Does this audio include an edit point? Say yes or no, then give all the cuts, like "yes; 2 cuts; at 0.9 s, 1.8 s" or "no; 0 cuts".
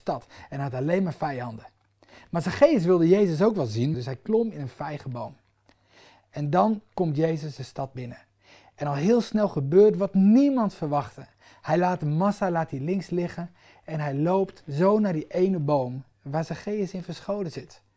yes; 1 cut; at 3.9 s